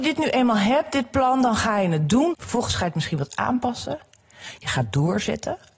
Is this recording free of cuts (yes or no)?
no